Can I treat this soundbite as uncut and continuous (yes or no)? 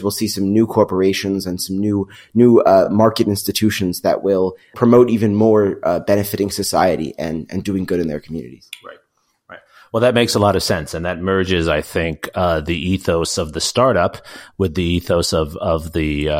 yes